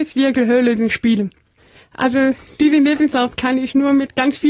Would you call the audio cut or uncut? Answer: uncut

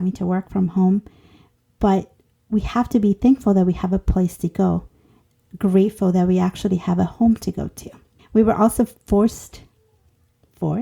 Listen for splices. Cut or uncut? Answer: cut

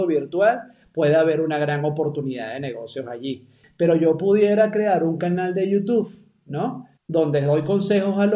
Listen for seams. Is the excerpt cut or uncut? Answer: cut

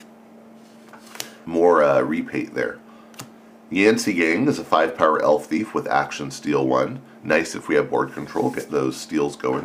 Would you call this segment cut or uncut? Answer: cut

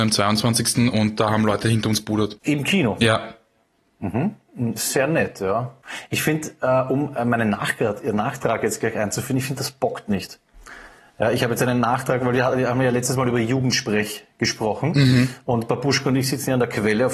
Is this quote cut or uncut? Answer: uncut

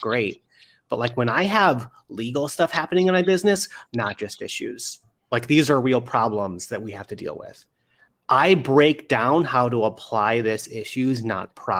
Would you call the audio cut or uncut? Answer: cut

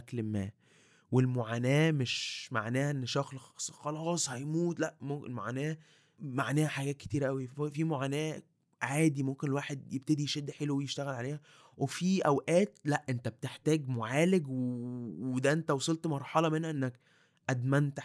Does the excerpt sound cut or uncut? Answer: uncut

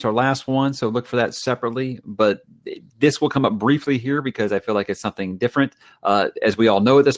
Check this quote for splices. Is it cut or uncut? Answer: uncut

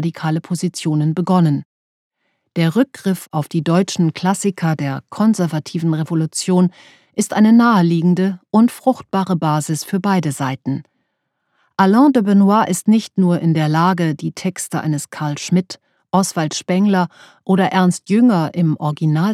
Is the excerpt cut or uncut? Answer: uncut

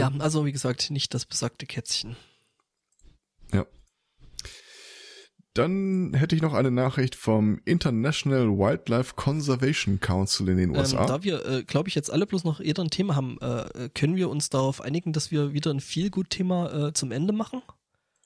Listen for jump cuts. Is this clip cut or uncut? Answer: uncut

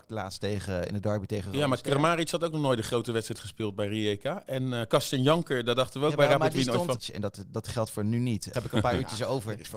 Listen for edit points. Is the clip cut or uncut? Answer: cut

